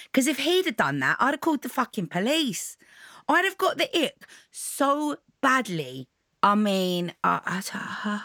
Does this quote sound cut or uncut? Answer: cut